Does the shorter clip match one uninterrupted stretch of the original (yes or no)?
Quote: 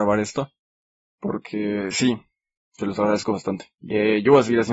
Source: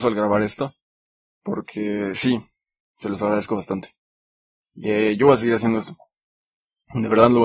no